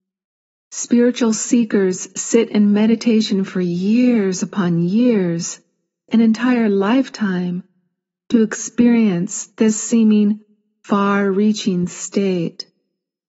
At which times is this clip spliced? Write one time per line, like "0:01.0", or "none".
0:06.1